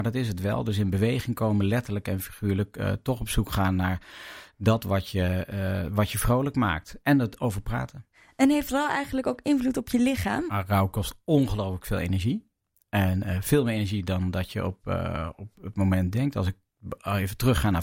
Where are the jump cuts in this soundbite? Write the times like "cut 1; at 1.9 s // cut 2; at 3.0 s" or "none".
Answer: none

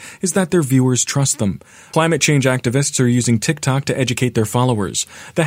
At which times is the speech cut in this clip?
cut 1; at 1.9 s

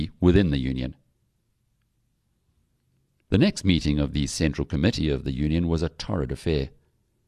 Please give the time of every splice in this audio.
none

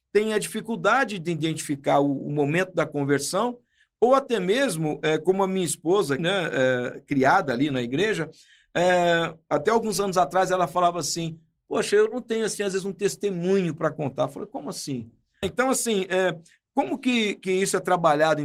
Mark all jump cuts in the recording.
cut 1; at 6.2 s // cut 2; at 15.4 s

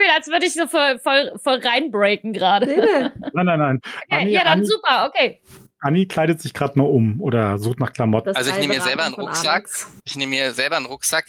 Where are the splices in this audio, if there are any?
cut 1; at 8.3 s // cut 2; at 10.0 s

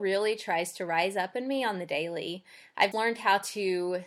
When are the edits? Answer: cut 1; at 2.9 s

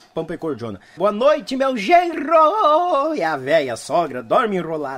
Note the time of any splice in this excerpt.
cut 1; at 1.0 s

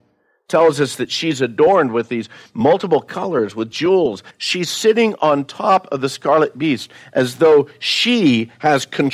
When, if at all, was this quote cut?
cut 1; at 4.3 s

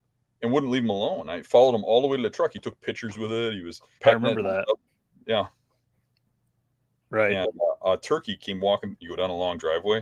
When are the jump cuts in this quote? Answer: cut 1; at 4.0 s // cut 2; at 7.0 s // cut 3; at 9.0 s

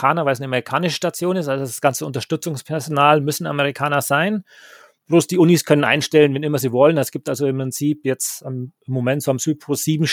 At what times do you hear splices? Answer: none

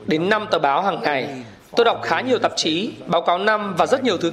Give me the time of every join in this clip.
cut 1; at 3.0 s

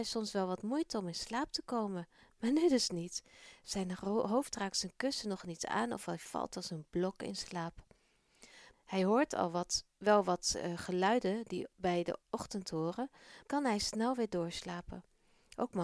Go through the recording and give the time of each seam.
cut 1; at 8.7 s // cut 2; at 12.2 s // cut 3; at 13.4 s

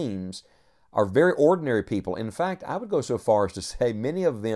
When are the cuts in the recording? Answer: none

